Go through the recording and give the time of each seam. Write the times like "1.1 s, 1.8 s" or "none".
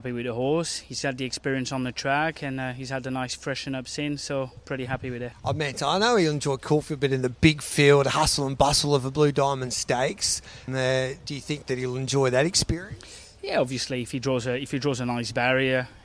5.3 s, 10.7 s

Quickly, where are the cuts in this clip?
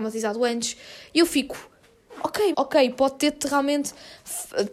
2.5 s

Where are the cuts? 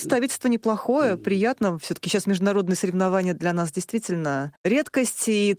4.6 s

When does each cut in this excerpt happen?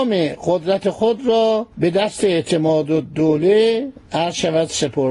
1.7 s

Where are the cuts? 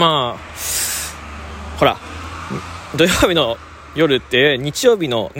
none

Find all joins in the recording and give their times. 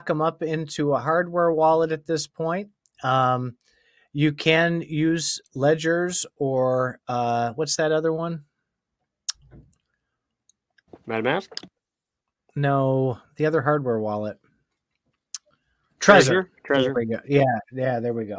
none

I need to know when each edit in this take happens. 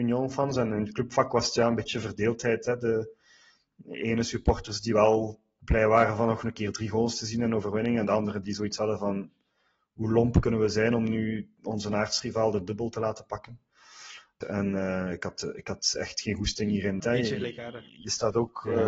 14.4 s, 17.0 s

